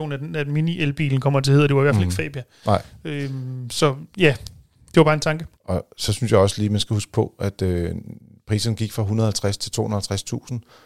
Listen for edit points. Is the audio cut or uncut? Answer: uncut